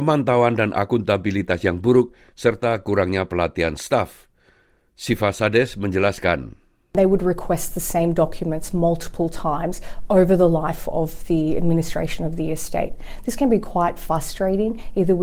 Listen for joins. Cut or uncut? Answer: uncut